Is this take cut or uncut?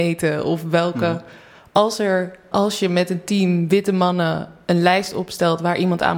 cut